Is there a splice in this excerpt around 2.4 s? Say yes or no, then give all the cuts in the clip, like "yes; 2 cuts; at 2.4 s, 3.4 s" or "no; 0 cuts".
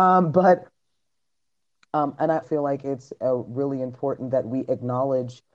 yes; 1 cut; at 2.4 s